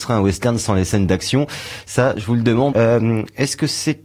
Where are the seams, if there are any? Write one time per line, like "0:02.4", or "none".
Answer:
0:02.7

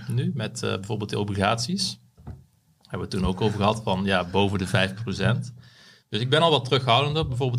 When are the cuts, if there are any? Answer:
none

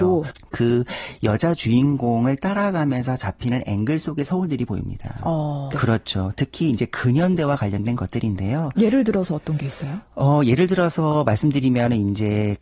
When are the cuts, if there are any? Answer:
0:05.7

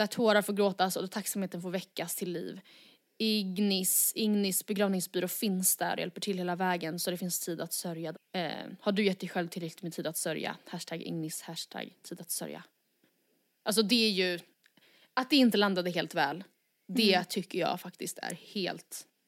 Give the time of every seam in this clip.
0:08.1

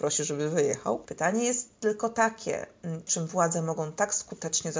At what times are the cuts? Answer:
0:01.1
0:03.1

